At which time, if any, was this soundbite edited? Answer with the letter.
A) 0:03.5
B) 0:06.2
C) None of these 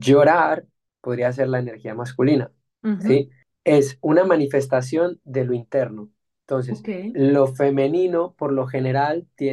C